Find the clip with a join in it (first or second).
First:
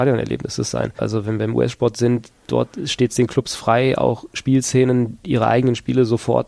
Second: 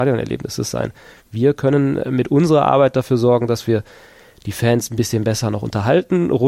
first